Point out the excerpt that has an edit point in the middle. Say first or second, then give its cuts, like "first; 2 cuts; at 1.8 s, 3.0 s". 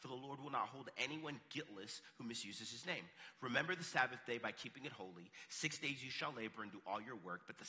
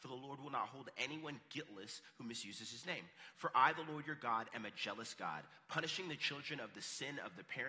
second; 1 cut; at 3.3 s